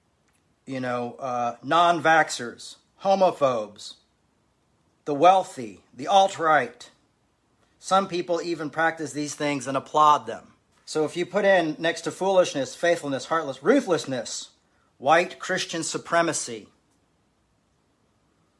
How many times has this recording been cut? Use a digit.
1